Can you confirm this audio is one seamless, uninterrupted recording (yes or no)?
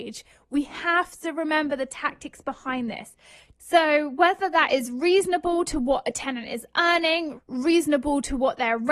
no